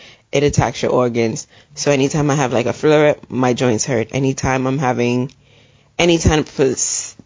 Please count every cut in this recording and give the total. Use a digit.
1